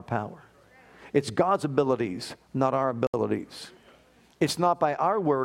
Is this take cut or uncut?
uncut